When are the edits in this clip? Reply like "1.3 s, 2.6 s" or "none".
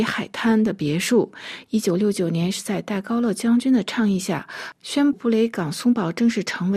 1.7 s, 5.1 s